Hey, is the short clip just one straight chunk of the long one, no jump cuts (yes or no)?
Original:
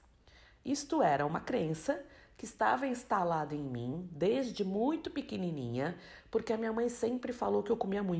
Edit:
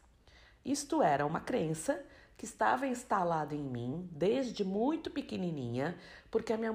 yes